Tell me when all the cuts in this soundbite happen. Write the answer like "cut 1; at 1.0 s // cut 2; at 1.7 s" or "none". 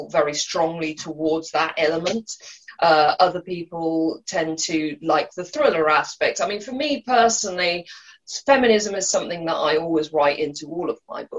none